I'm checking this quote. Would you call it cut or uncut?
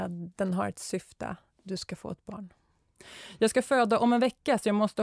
uncut